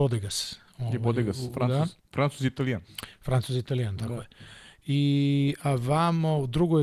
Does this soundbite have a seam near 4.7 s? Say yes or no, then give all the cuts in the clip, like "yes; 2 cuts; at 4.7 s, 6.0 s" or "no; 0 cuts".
no; 1 cut; at 2.0 s